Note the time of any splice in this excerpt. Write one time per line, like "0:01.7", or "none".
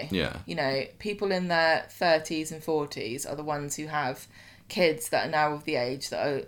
none